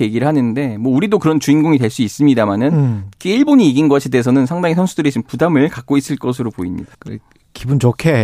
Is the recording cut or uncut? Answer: cut